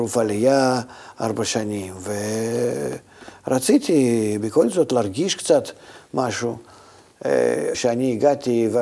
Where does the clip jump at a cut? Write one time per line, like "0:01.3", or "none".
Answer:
0:07.7